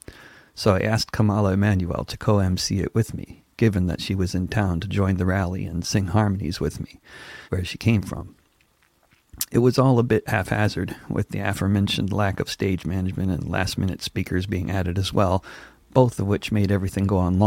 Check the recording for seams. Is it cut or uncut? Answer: cut